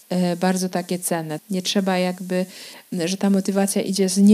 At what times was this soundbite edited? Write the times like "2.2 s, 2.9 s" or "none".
1.4 s